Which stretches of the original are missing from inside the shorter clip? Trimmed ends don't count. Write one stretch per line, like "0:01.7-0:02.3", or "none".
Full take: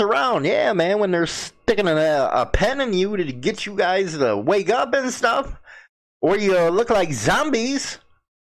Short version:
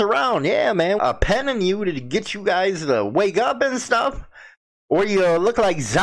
0:01.0-0:02.3